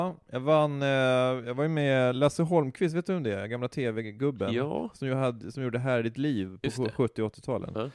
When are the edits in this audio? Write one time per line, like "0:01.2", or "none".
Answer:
none